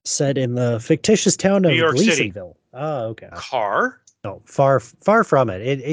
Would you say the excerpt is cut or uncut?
cut